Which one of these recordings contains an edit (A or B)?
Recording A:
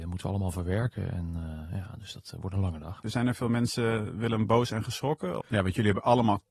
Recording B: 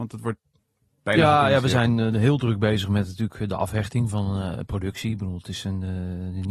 A